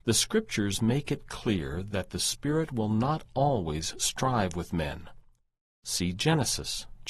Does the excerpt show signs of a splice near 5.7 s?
no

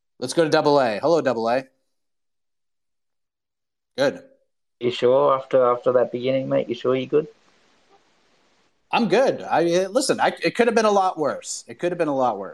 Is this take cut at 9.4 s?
no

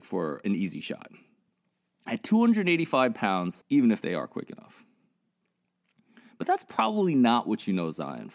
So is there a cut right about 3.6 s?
yes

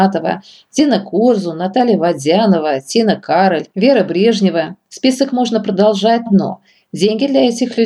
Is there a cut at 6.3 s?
yes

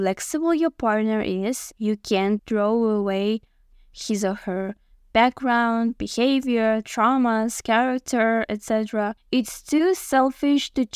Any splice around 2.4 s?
yes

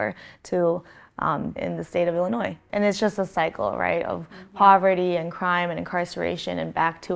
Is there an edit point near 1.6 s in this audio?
yes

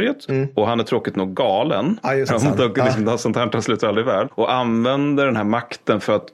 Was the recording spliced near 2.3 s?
yes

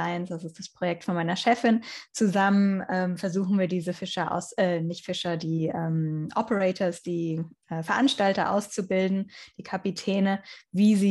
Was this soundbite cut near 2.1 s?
no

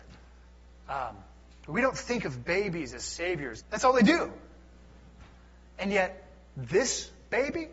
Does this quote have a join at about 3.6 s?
yes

